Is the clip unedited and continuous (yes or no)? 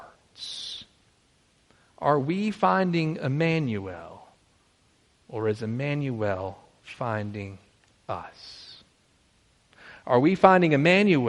yes